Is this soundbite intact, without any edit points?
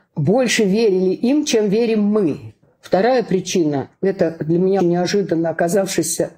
no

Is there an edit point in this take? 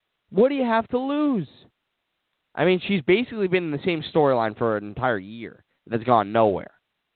yes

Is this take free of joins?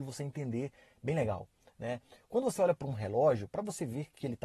yes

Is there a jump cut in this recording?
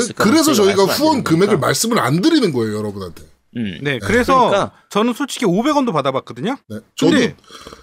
yes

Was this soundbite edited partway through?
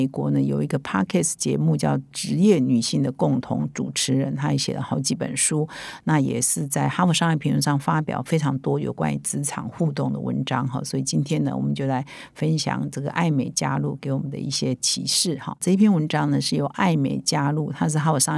yes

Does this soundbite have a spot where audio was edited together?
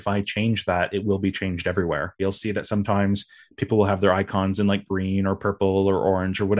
yes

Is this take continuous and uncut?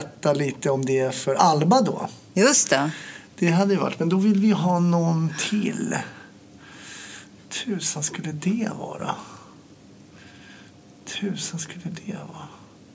yes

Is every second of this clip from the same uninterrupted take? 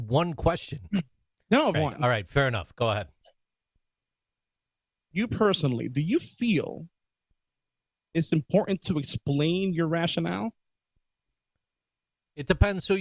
no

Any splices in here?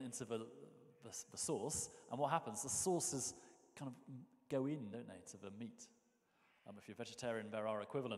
no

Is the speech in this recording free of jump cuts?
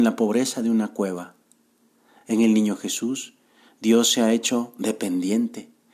yes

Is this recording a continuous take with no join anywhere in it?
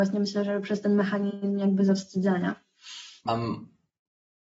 no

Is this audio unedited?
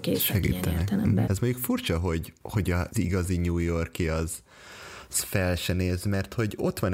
no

